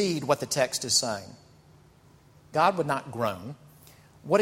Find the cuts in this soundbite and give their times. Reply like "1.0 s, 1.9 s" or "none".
2.5 s